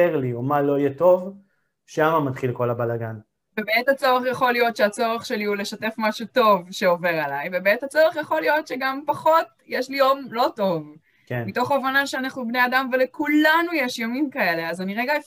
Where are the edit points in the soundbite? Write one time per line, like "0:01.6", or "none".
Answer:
0:03.5